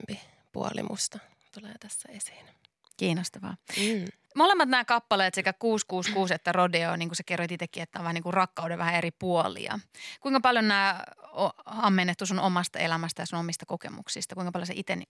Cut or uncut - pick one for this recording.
uncut